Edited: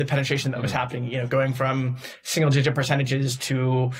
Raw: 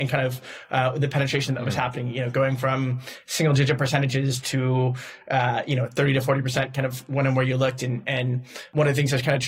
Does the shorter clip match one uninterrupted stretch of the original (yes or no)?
yes